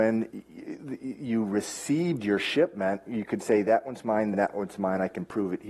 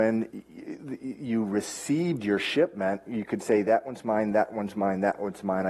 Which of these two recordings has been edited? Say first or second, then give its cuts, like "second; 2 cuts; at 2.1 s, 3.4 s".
first; 1 cut; at 4.3 s